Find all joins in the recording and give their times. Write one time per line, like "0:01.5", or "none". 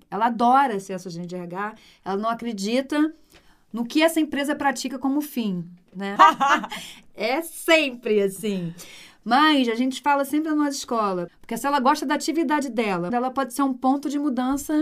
0:06.2
0:11.3
0:13.1